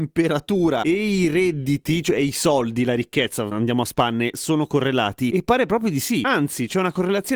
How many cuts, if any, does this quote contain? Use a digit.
0